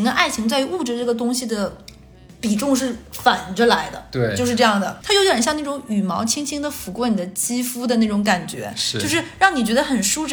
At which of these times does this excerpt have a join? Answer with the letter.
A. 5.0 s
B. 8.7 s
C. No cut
A